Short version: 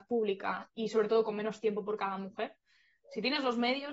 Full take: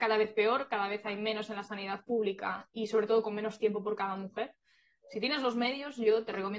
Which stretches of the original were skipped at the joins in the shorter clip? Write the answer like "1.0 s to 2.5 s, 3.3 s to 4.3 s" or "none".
none